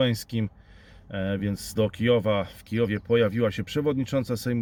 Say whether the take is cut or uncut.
uncut